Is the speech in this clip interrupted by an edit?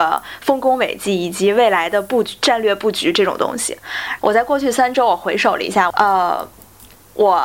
yes; 2 cuts; at 4.2 s, 5.9 s

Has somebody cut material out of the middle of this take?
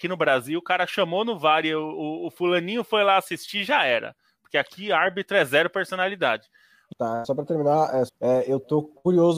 yes; 2 cuts; at 6.9 s, 8.1 s

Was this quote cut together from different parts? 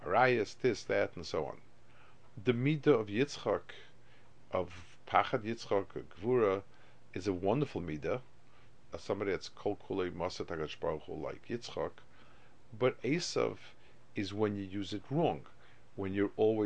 yes; 1 cut; at 8.9 s

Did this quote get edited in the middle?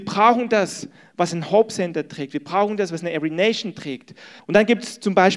yes; 1 cut; at 4.4 s

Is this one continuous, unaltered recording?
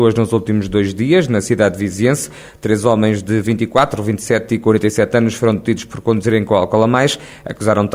yes; 0 cuts

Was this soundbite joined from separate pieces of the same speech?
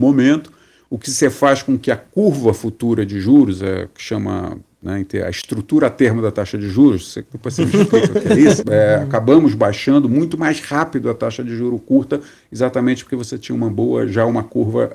yes; 1 cut; at 8.6 s

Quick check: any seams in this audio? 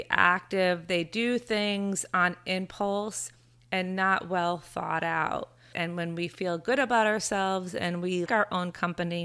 yes; 2 cuts; at 5.7 s, 8.3 s

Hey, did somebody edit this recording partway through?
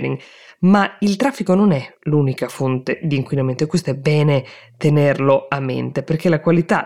no; 0 cuts

